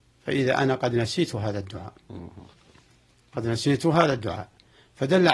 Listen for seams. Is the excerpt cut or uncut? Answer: uncut